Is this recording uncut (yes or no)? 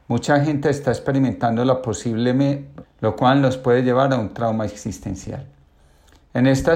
no